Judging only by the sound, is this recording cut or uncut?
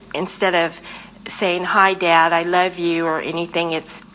uncut